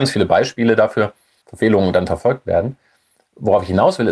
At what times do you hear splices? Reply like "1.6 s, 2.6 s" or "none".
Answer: 1.4 s